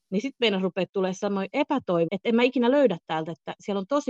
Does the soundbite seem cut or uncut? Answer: cut